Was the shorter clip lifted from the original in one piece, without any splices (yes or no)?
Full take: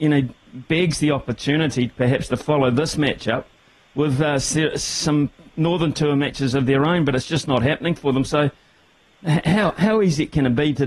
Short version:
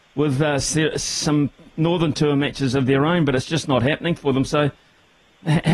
yes